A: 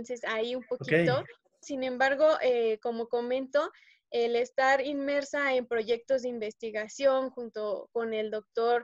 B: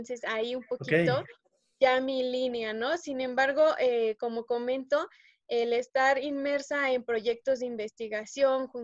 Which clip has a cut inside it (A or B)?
A